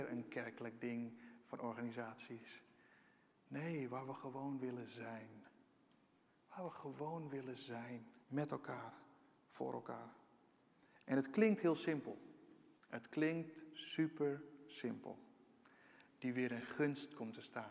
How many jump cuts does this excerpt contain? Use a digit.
3